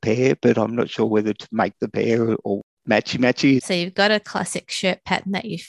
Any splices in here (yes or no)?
yes